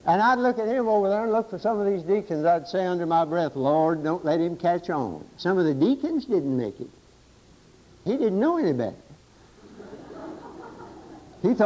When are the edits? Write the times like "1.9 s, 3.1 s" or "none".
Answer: 5.4 s, 8.1 s